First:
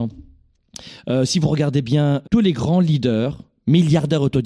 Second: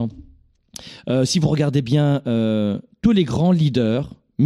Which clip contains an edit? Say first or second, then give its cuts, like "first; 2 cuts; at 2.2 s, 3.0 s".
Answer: first; 1 cut; at 2.2 s